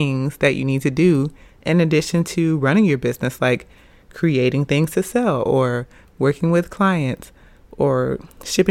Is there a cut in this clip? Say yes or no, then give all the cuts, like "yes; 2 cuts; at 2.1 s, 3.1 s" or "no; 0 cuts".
no; 0 cuts